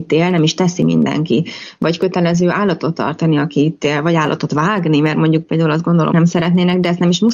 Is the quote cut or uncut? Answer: cut